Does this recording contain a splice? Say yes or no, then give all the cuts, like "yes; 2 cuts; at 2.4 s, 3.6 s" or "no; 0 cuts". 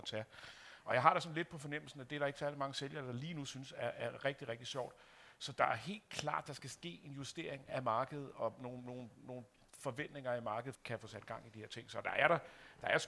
yes; 1 cut; at 10.7 s